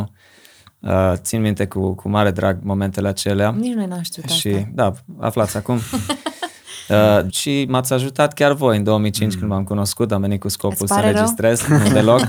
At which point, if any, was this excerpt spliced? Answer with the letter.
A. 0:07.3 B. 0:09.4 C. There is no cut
A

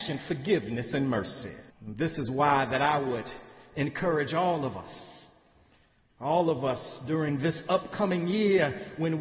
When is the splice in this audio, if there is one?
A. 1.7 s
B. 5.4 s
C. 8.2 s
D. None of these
A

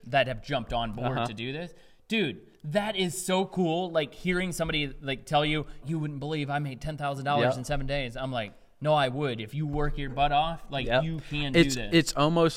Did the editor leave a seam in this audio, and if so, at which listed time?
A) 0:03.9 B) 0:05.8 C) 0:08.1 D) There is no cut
B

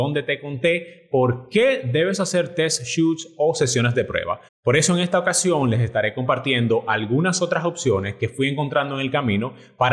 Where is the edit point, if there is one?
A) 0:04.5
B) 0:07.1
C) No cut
A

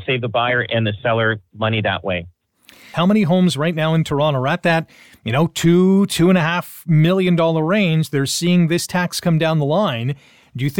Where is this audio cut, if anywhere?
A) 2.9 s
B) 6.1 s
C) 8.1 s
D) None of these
A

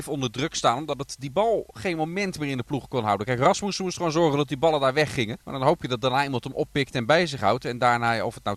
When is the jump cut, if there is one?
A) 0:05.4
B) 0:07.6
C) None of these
A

